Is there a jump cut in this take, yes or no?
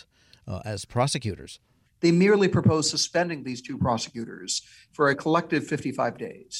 yes